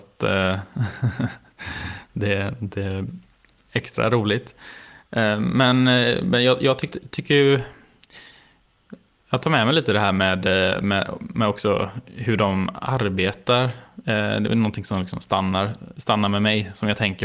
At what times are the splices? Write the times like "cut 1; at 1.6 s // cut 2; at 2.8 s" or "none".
none